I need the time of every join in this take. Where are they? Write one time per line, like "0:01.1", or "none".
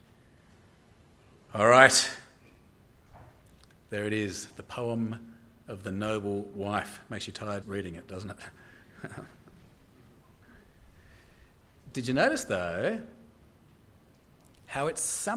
0:07.6